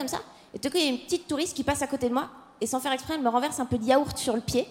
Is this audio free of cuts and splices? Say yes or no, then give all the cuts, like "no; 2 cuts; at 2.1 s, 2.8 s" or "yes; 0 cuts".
yes; 0 cuts